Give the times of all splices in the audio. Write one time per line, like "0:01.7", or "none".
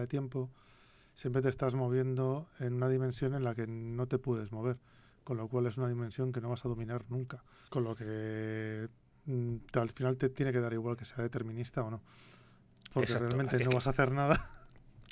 0:07.7